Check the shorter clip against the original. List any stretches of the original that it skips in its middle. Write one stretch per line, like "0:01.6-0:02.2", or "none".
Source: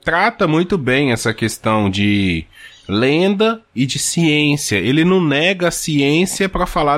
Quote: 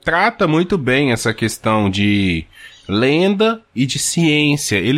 none